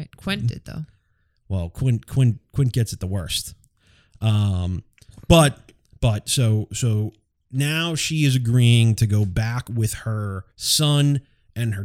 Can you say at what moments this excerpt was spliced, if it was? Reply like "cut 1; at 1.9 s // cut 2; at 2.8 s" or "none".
cut 1; at 10.5 s